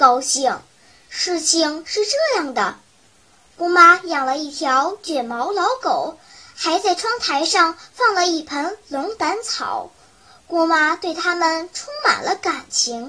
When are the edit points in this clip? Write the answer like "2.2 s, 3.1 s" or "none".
none